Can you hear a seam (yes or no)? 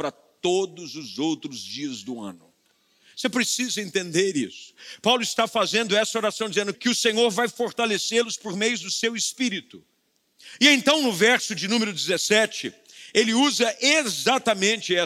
yes